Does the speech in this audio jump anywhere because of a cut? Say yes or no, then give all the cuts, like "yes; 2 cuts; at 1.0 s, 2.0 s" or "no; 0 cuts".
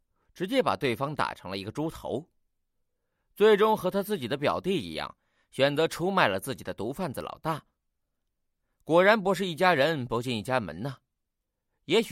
no; 0 cuts